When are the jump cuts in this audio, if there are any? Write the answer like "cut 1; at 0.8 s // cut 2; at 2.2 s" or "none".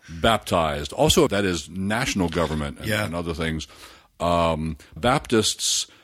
cut 1; at 1.3 s // cut 2; at 5.0 s